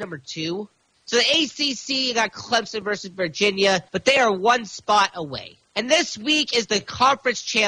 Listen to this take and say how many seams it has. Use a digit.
3